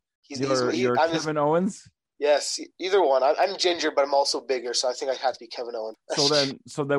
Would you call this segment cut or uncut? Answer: cut